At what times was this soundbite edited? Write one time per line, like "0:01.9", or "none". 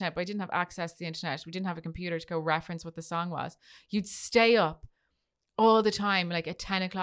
none